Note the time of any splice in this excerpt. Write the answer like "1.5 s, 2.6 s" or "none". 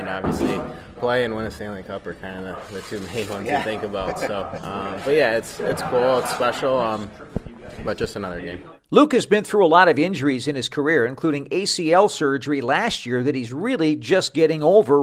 none